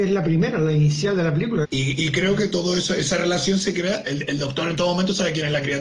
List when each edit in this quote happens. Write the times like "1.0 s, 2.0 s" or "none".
1.6 s

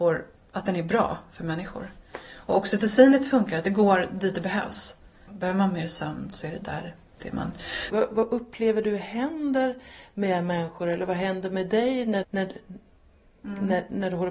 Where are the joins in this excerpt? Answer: 5.3 s, 7.9 s, 12.2 s

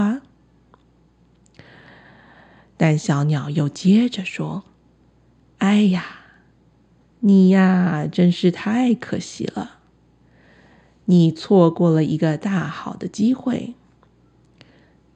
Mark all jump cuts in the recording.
none

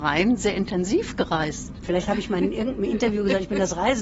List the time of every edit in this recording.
1.8 s

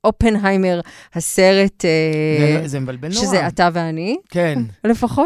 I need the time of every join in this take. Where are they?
none

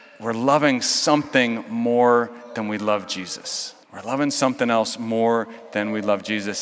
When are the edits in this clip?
3.8 s

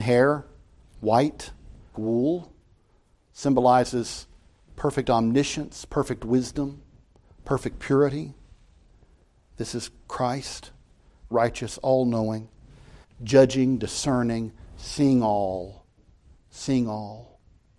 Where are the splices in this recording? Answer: 1.9 s, 11.3 s, 13.0 s

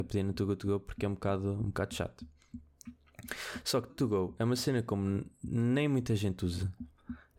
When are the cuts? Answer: 3.9 s

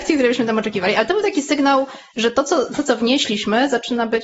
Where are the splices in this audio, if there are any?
none

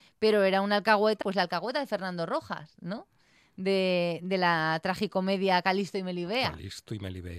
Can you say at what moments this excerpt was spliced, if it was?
1.2 s

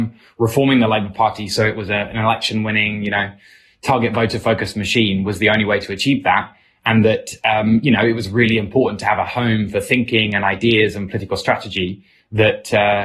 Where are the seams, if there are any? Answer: none

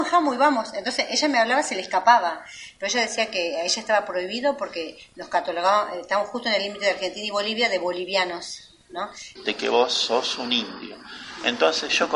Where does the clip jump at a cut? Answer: 9.4 s

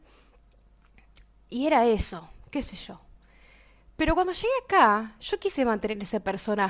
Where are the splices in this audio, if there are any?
none

